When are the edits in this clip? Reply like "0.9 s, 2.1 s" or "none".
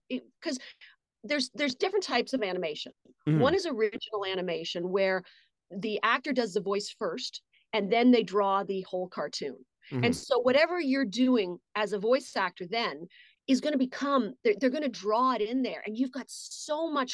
none

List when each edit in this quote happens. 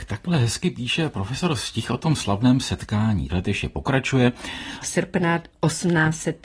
3.3 s, 4.8 s

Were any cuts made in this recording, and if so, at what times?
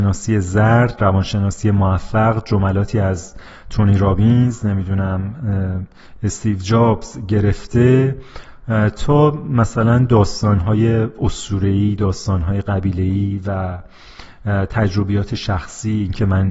none

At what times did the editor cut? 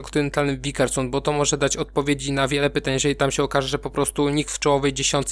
none

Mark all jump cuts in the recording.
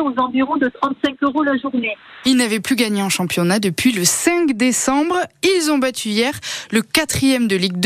2.2 s

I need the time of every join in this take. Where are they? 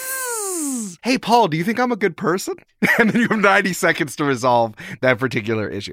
1.0 s

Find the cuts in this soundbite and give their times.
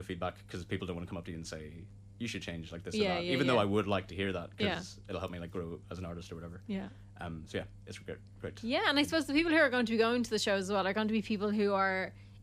none

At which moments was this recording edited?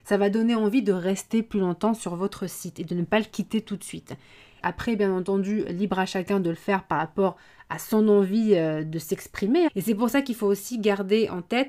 4.6 s, 9.7 s

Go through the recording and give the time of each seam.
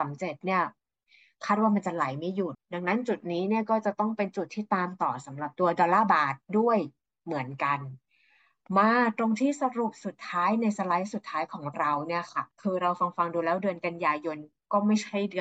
2.5 s, 12.5 s

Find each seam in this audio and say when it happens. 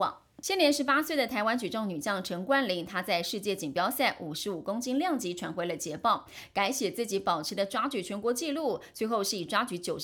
none

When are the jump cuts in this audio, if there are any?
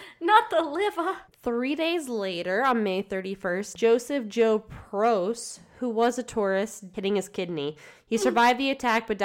1.3 s, 3.7 s, 6.9 s

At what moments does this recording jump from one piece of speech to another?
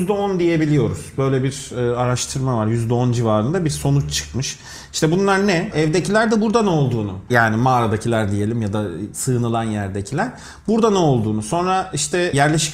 5.7 s

